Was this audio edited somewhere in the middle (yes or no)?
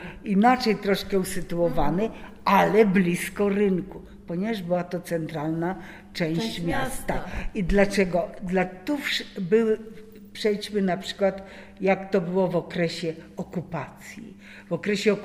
no